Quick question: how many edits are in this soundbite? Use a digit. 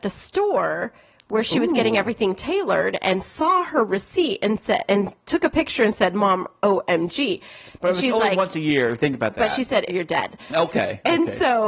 1